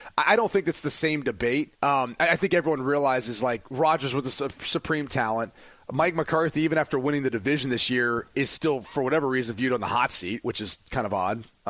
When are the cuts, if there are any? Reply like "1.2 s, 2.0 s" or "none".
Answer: 1.8 s

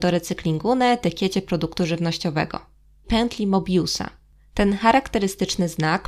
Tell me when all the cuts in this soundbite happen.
3.0 s

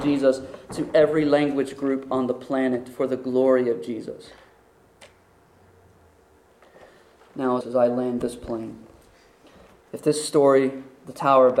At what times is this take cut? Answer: 7.6 s

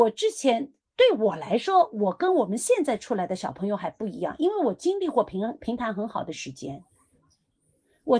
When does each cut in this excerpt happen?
none

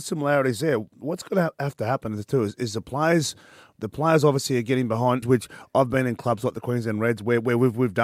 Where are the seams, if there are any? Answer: 5.2 s

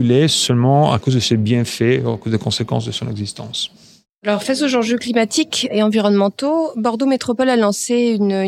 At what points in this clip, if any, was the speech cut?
none

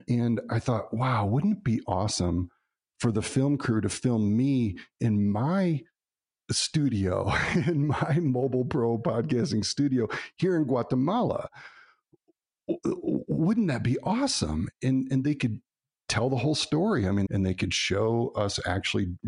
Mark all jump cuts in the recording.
17.3 s

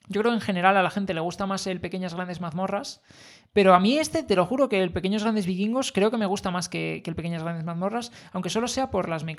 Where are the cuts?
none

